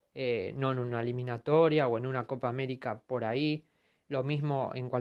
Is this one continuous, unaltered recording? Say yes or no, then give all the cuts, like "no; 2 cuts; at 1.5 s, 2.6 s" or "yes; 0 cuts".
no; 1 cut; at 4.0 s